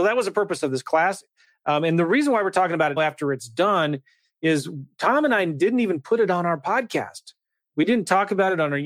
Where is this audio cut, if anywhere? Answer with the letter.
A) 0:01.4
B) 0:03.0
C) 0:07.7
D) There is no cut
B